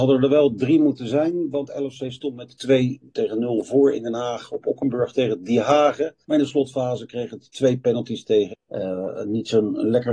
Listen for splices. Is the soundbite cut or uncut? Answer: cut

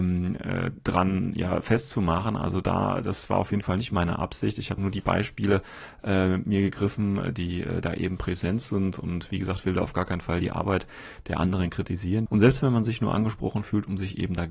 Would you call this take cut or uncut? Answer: cut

